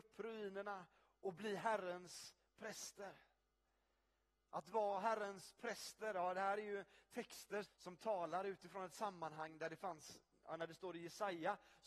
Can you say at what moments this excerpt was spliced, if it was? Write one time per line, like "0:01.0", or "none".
0:07.6